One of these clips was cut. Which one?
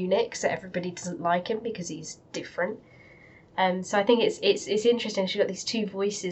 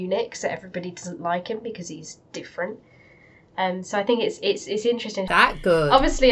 second; 1 cut; at 5.3 s

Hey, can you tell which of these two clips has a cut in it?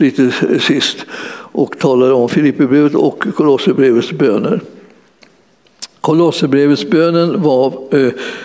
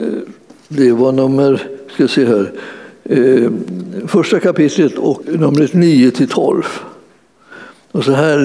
second; 1 cut; at 5.2 s

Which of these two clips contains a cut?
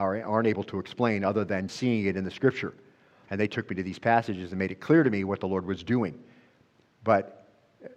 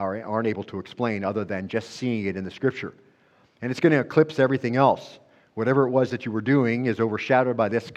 first; 2 cuts; at 1.7 s, 3.3 s

